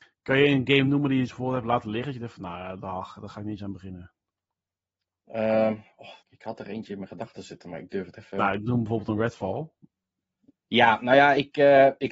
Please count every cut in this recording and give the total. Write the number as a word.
one